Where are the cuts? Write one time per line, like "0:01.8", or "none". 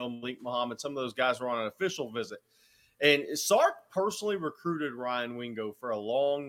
none